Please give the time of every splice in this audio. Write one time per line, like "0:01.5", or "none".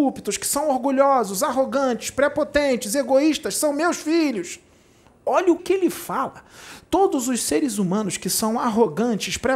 0:05.6